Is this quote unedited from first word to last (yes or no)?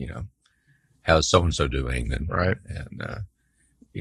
yes